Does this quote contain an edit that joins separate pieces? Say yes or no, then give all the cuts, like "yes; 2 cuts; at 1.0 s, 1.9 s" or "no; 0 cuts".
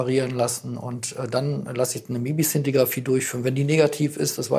no; 0 cuts